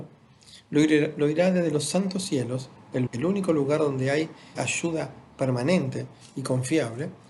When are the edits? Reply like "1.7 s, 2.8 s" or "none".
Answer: 3.1 s, 4.6 s